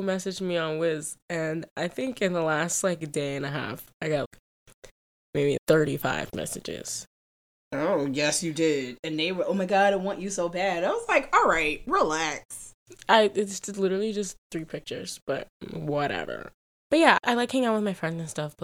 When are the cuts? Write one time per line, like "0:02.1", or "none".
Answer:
none